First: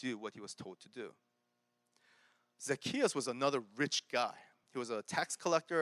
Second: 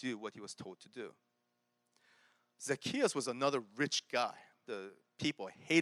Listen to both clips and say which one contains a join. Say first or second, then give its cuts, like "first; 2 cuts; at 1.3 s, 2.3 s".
second; 1 cut; at 4.6 s